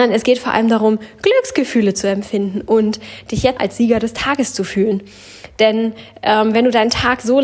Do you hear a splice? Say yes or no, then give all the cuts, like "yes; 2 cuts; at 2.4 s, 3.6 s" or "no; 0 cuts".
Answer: yes; 1 cut; at 3.6 s